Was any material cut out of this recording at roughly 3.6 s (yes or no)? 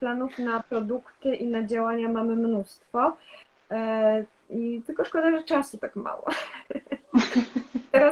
no